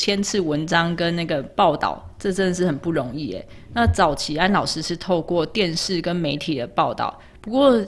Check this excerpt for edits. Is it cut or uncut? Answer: uncut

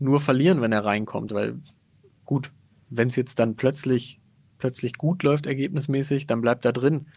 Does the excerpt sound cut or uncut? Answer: uncut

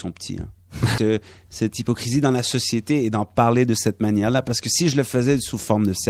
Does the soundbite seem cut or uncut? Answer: cut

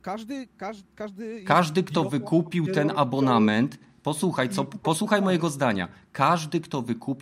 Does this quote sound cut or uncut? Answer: uncut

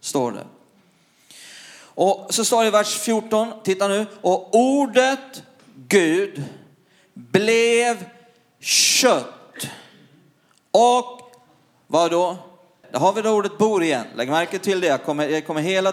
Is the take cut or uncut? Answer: cut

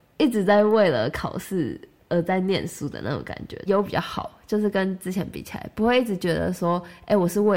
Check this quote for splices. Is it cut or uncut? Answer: cut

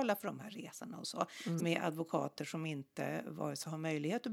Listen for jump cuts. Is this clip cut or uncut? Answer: cut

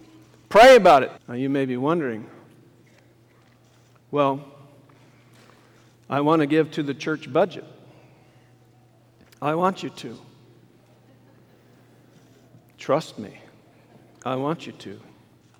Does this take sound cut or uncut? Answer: cut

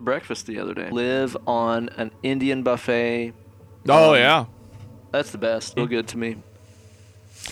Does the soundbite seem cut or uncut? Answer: cut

